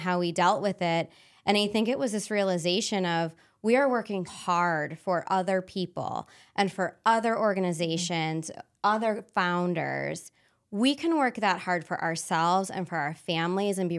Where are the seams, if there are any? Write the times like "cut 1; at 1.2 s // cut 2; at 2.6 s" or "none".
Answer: cut 1; at 4.3 s